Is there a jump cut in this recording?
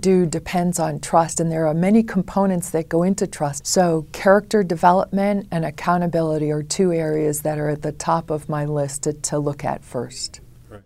yes; 1 cut; at 3.6 s

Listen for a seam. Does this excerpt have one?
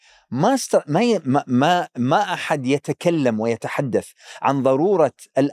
no; 0 cuts

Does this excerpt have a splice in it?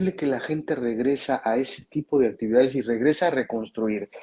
no; 0 cuts

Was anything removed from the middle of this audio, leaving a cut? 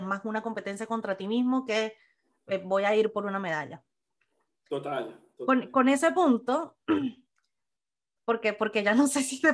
no; 0 cuts

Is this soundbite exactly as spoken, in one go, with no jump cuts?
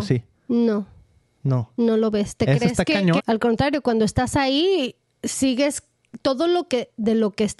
no; 1 cut; at 3.2 s

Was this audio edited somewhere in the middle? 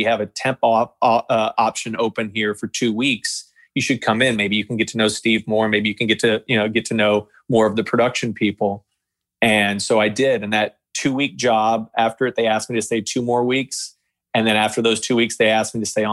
no; 0 cuts

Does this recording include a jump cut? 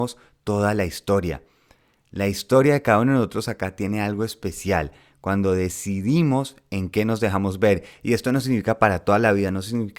no; 0 cuts

